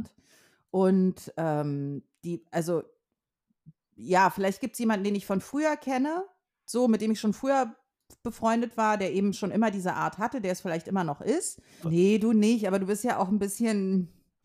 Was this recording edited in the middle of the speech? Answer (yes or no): yes